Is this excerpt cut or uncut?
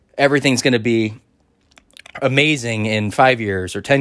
uncut